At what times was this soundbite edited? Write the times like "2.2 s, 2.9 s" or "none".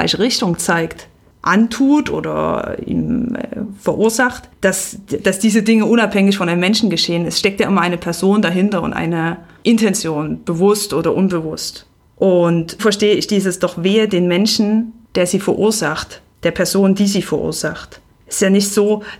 12.8 s